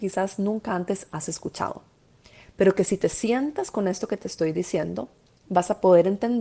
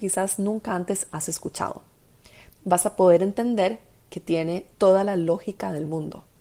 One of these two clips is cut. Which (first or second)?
second